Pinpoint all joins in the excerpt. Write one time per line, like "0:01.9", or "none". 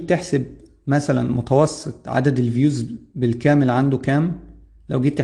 none